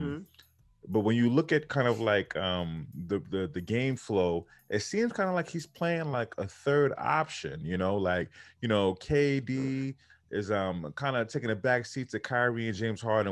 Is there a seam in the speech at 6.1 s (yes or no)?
no